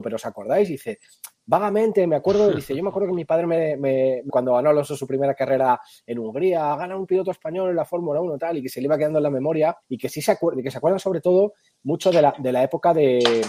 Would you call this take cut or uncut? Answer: cut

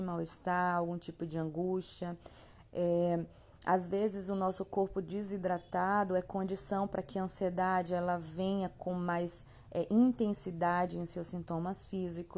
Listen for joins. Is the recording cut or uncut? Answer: uncut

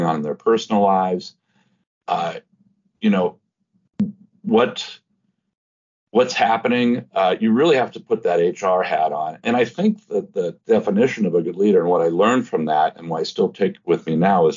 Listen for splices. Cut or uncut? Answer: uncut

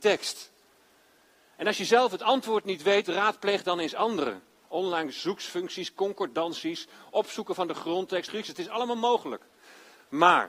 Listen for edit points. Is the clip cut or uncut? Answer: cut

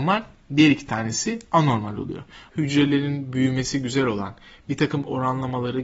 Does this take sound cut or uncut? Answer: cut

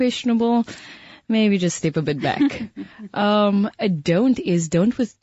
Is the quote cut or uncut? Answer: uncut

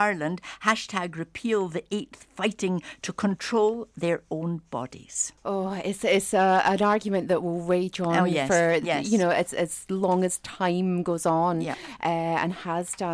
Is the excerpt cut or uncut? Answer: cut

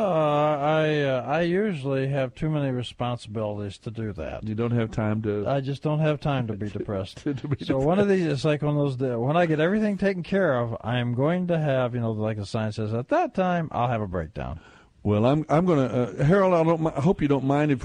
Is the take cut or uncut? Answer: uncut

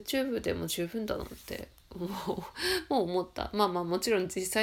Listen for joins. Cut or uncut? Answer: uncut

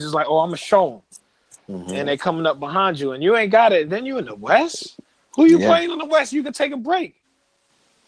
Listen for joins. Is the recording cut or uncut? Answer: uncut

